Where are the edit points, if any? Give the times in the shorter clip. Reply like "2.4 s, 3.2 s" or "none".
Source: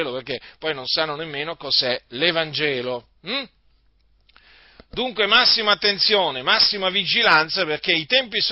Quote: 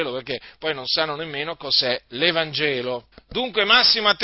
3.1 s